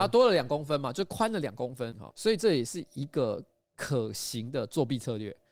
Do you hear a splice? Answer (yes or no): yes